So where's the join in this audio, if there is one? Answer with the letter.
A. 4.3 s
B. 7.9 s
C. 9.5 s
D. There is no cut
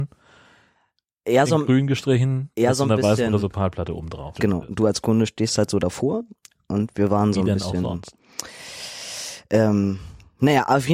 A